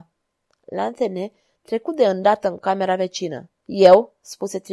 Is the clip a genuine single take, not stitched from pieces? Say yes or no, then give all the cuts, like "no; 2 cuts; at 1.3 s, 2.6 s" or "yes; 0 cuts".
no; 1 cut; at 3.6 s